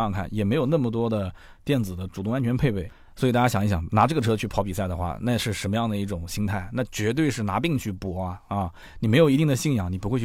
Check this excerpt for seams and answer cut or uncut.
uncut